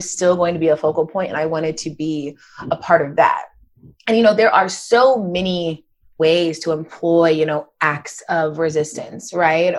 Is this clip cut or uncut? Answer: uncut